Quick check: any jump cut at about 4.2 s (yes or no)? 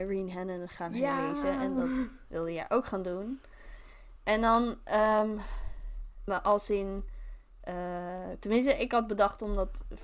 no